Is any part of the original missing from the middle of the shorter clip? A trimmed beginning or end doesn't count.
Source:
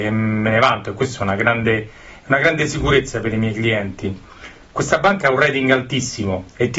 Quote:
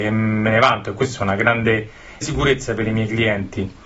yes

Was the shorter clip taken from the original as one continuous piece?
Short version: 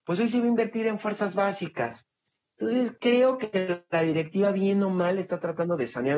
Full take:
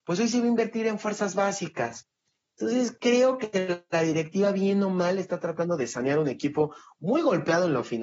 yes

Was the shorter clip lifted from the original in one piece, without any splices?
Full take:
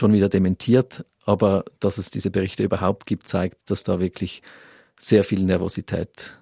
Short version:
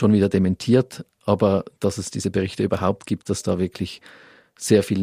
no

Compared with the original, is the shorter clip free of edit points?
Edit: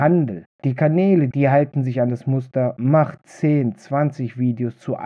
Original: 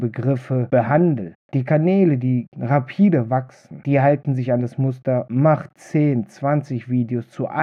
no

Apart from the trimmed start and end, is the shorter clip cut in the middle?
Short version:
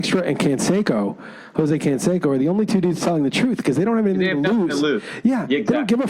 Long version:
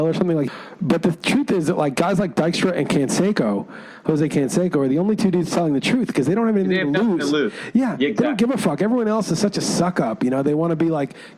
no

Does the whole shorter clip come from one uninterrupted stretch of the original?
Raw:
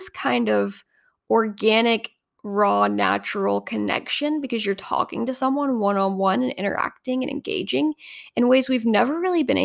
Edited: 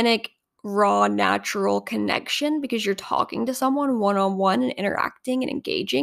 yes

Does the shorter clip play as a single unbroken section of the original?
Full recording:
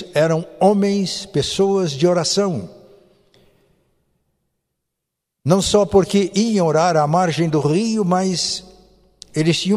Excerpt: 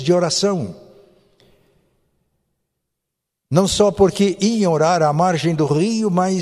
yes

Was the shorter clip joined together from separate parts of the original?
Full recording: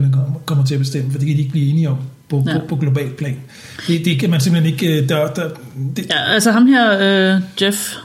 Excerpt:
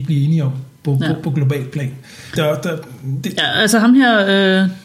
yes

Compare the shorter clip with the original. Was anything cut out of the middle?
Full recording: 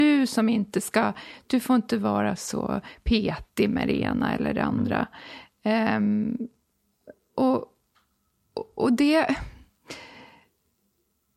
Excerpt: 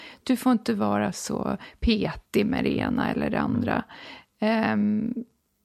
no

